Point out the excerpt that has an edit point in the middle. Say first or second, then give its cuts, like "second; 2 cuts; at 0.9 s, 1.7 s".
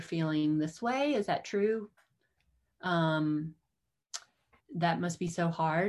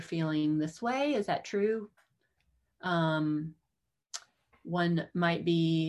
first; 1 cut; at 4.6 s